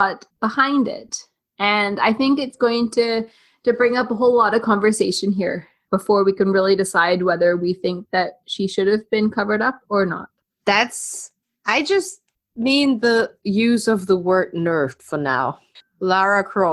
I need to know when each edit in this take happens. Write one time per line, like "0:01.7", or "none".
0:15.8